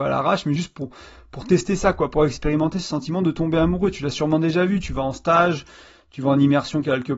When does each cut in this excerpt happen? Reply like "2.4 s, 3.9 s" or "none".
none